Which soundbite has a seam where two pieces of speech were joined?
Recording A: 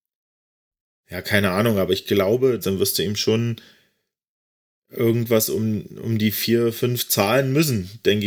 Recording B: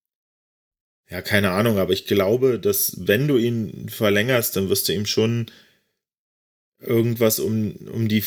A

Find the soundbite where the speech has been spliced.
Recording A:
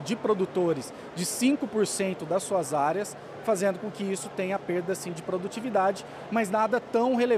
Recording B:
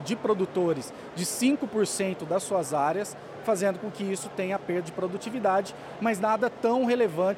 B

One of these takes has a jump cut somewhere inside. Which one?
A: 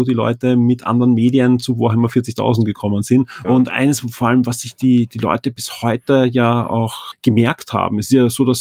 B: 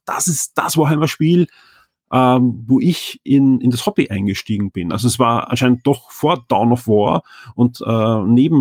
A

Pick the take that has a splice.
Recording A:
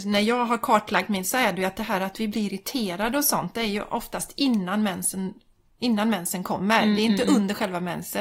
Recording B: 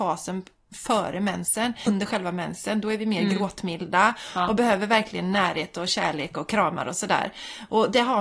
B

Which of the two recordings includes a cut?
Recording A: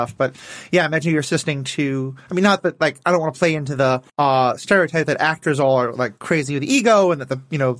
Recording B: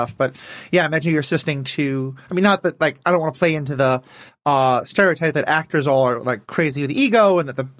A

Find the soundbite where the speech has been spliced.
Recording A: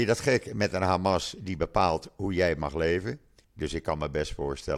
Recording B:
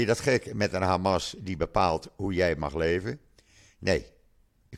A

